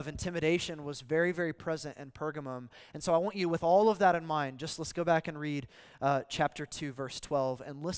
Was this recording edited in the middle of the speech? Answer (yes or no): no